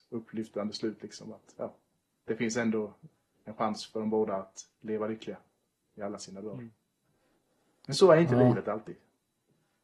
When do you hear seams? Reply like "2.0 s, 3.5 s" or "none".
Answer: none